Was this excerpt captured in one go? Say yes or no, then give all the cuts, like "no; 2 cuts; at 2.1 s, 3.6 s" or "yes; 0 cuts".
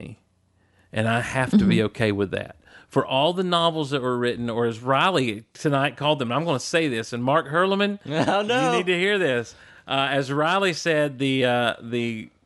yes; 0 cuts